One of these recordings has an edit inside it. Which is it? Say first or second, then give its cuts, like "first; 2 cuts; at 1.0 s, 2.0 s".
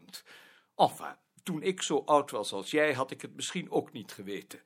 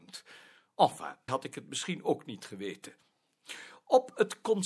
second; 1 cut; at 1.3 s